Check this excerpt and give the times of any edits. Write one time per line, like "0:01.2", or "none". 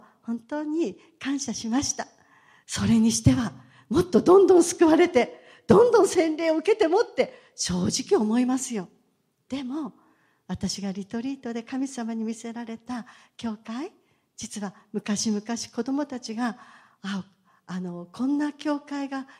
0:02.6